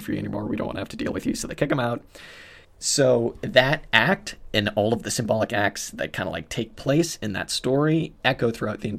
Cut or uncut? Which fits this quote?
cut